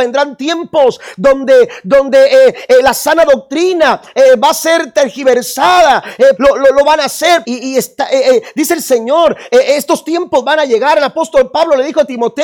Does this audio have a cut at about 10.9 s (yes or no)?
no